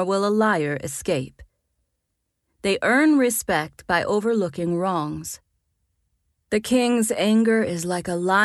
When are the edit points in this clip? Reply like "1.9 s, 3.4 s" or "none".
2.5 s